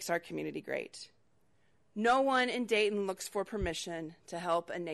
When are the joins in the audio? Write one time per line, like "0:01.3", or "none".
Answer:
none